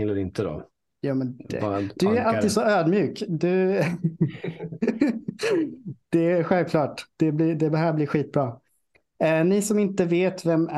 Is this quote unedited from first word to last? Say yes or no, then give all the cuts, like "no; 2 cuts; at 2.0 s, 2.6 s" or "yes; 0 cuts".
yes; 0 cuts